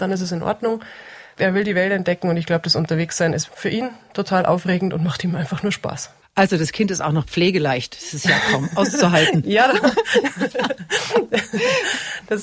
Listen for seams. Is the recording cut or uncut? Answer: cut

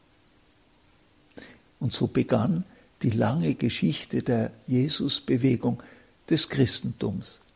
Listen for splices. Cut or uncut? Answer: cut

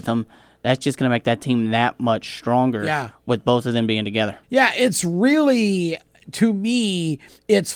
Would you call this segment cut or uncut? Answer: cut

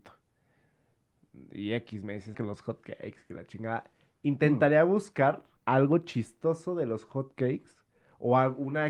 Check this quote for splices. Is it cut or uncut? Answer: cut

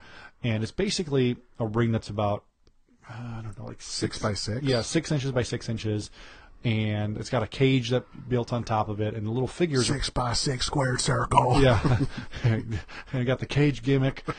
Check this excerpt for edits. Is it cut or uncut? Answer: uncut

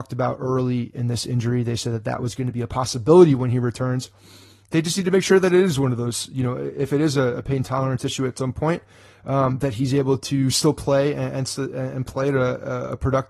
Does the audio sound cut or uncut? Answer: uncut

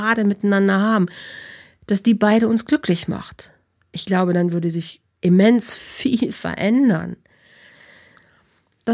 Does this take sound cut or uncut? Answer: uncut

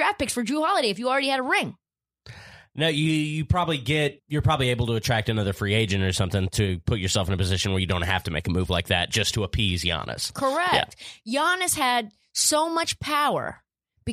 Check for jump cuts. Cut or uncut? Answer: cut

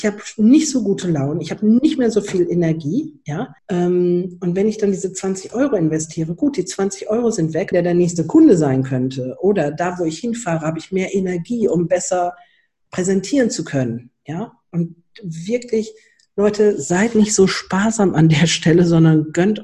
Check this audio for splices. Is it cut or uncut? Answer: cut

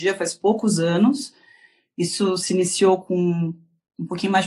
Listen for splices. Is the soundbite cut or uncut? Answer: uncut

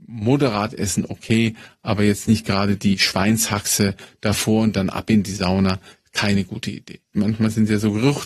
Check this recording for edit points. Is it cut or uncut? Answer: cut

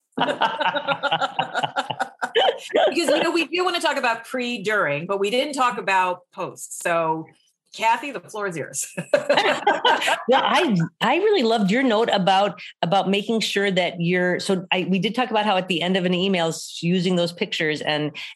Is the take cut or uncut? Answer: uncut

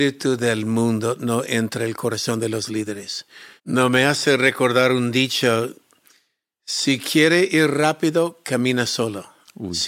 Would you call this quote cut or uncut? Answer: cut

